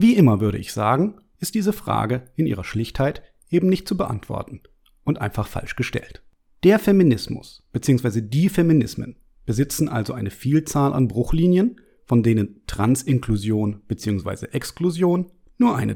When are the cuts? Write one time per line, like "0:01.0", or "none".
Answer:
none